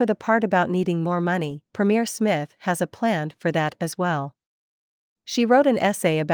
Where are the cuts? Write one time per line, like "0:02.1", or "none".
0:01.7